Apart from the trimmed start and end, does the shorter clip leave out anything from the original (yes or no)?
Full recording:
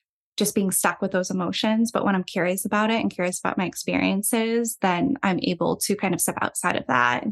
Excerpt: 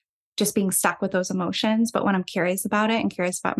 no